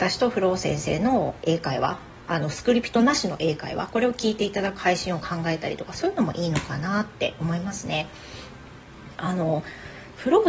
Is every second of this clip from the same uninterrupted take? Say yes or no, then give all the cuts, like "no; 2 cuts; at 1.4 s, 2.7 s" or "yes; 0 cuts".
yes; 0 cuts